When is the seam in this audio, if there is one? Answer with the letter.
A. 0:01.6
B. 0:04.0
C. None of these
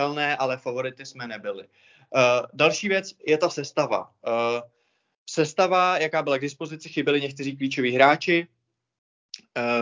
C